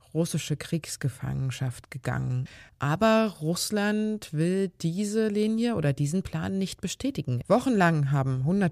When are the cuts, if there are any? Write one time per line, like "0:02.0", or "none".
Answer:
0:02.7
0:07.4